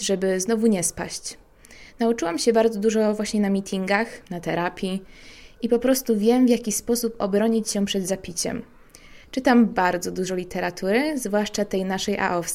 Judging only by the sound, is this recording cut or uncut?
cut